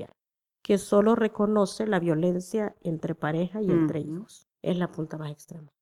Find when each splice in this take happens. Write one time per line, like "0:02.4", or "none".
0:04.5